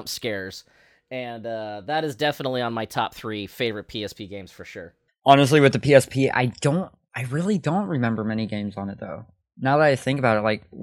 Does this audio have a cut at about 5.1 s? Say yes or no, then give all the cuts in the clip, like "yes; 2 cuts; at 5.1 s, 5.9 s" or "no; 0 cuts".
yes; 1 cut; at 5.1 s